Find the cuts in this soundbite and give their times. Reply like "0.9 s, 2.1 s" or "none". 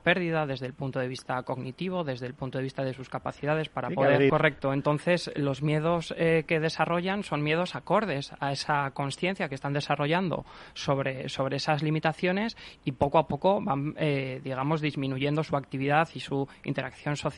4.3 s